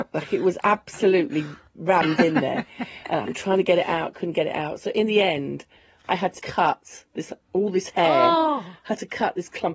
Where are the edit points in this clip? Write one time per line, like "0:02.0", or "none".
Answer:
0:06.4

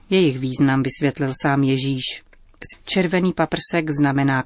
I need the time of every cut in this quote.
0:02.7

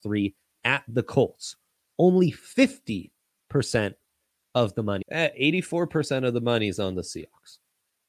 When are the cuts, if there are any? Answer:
0:05.0

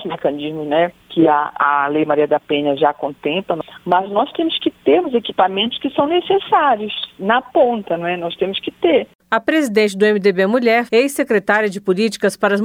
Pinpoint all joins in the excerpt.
0:09.2
0:10.9

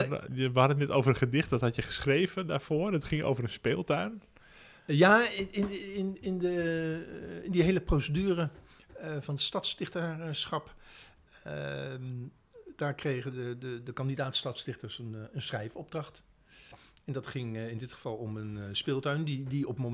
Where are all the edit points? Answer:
none

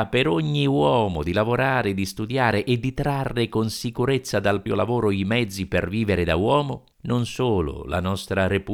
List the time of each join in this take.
0:04.7
0:06.9

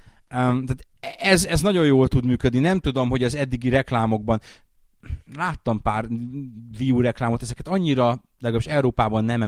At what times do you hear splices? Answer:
none

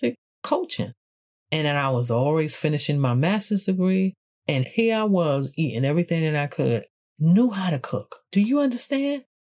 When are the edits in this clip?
none

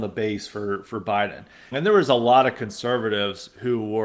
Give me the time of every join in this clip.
0:01.7

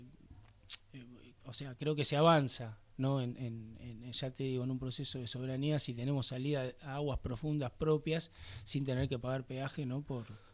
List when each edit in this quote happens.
0:01.4

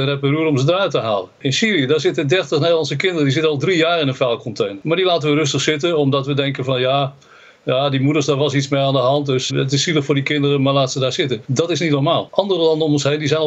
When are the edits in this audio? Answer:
0:09.5

